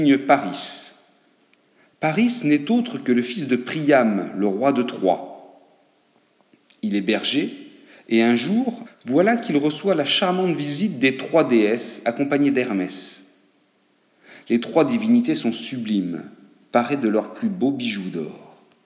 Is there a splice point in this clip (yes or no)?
yes